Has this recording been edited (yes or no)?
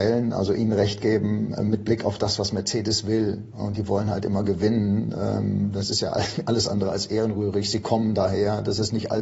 no